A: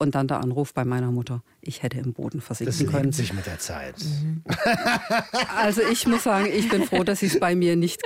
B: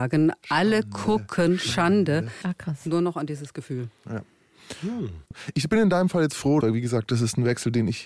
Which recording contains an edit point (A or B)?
B